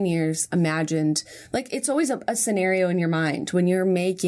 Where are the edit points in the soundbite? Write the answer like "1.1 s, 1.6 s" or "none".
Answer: none